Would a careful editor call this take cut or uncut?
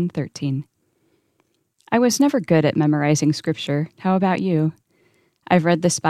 uncut